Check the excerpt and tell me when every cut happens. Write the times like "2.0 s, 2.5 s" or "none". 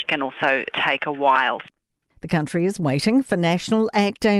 2.1 s